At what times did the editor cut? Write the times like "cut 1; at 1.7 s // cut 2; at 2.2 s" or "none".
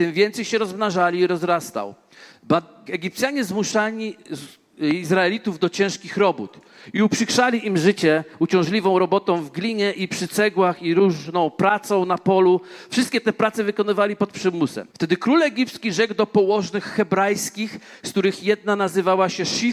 cut 1; at 2.9 s // cut 2; at 14.9 s